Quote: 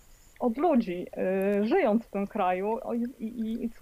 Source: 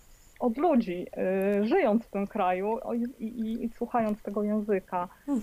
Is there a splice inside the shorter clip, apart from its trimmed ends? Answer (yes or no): no